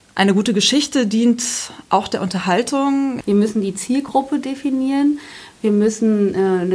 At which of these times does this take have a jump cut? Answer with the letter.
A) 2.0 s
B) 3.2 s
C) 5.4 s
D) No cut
B